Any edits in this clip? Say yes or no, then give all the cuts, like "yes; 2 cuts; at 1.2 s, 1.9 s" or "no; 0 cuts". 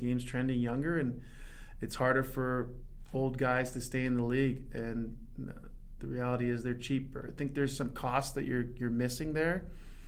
no; 0 cuts